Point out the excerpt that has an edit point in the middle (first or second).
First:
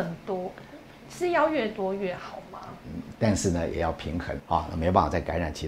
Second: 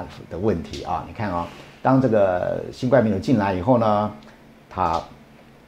first